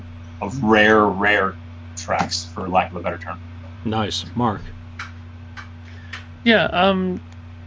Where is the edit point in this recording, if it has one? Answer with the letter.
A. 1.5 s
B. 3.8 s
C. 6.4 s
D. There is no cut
D